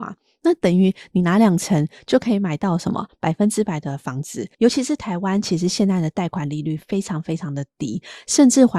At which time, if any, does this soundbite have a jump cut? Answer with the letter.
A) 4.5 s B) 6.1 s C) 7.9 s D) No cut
A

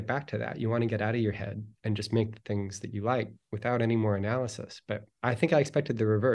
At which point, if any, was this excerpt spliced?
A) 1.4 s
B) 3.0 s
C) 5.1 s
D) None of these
C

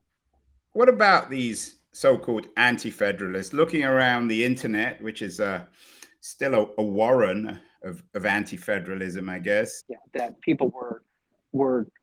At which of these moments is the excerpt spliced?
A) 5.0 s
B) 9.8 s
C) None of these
B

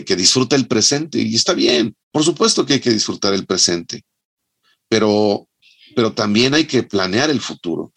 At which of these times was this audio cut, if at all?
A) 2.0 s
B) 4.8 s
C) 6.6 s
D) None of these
A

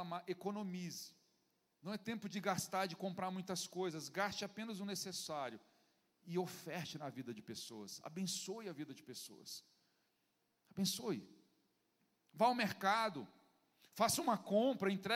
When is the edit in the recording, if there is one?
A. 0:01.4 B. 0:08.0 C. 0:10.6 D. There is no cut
D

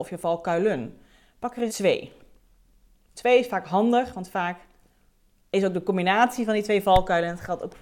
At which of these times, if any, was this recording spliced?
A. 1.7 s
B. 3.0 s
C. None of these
A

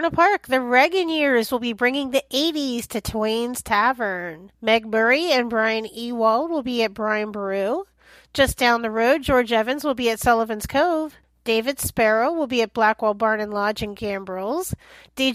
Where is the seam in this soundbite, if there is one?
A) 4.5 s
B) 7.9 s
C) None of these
A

